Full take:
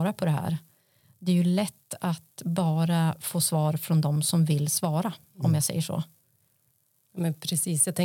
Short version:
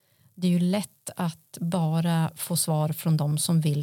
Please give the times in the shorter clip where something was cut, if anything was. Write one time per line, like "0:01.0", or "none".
none